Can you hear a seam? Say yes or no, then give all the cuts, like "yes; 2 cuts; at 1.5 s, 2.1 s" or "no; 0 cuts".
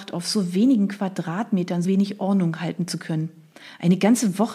yes; 1 cut; at 1.8 s